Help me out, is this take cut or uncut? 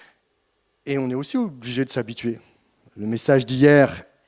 uncut